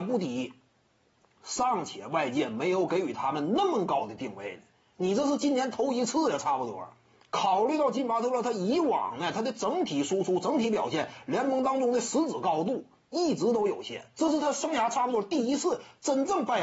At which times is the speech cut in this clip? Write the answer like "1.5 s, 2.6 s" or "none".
7.3 s

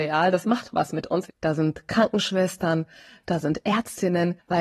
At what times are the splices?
1.3 s

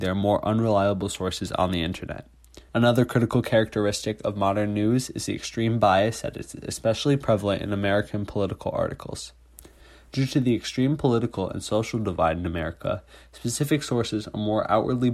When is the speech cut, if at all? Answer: 2.7 s

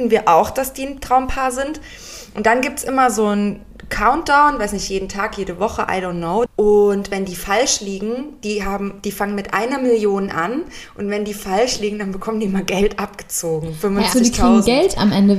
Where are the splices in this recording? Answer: 6.5 s, 14.1 s

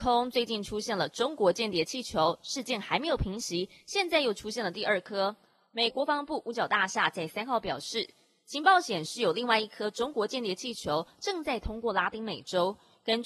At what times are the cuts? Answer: 5.9 s

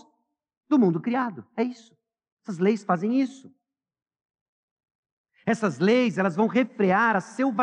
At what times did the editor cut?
none

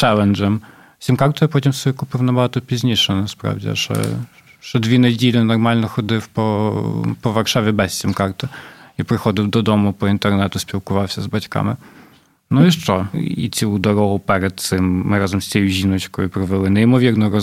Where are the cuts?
13.1 s

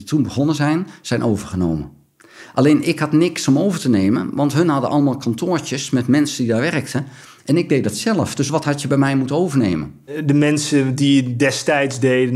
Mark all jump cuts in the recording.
10.1 s

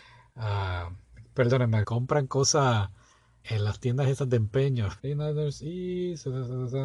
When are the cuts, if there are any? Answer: 1.8 s, 3.4 s, 5.0 s

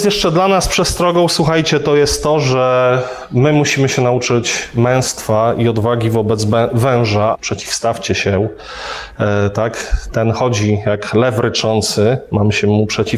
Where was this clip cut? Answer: 7.3 s

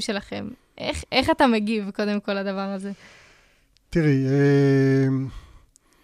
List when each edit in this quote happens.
none

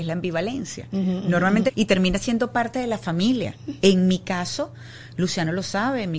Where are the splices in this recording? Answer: 1.7 s

